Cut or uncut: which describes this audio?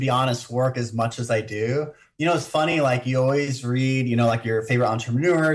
uncut